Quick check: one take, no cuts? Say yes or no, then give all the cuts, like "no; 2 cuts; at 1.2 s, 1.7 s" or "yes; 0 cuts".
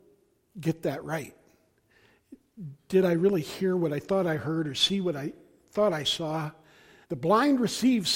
no; 1 cut; at 7.0 s